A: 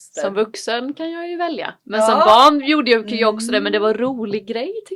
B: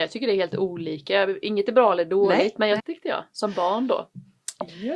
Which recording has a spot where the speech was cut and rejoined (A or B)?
B